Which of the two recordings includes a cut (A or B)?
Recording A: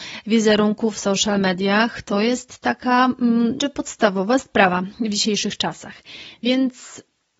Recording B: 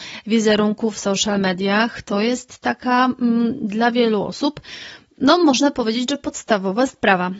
A